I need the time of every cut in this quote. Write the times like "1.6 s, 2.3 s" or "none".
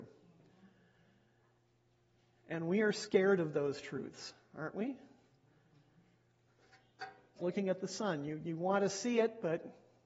7.4 s